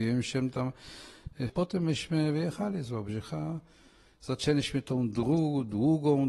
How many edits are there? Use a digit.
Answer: 1